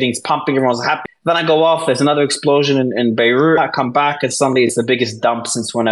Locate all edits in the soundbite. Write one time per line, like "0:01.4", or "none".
0:01.1
0:03.6